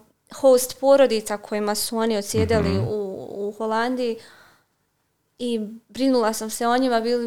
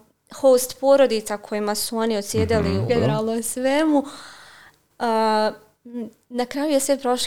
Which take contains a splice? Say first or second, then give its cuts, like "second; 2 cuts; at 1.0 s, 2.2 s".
second; 2 cuts; at 2.9 s, 4.9 s